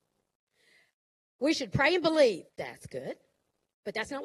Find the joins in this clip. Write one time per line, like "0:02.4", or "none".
0:02.5